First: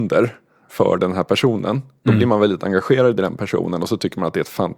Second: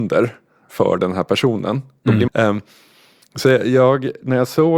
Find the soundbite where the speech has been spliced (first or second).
second